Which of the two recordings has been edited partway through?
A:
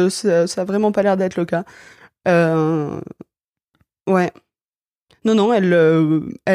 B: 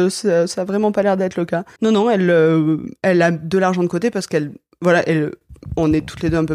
B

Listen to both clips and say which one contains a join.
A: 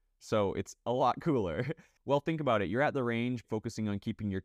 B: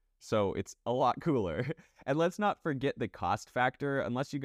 A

